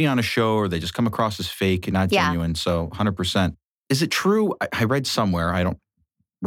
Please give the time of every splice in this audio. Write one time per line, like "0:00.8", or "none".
none